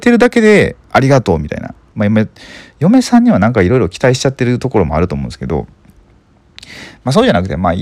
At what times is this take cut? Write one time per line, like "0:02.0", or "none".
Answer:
0:01.9